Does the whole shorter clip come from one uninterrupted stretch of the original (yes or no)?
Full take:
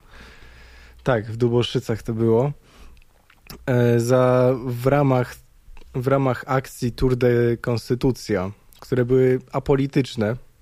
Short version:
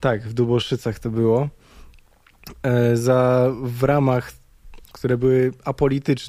no